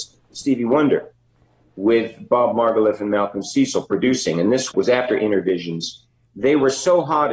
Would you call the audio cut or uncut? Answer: uncut